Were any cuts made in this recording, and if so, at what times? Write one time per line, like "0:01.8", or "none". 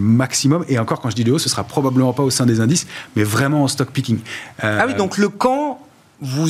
none